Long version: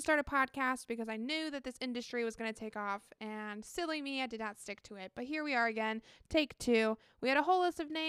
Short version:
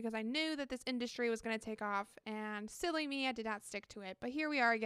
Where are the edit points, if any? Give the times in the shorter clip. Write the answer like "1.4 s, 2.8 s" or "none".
none